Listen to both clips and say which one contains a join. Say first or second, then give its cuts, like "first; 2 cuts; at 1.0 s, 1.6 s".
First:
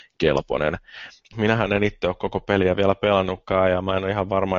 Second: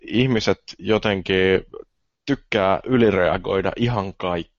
first; 1 cut; at 1.3 s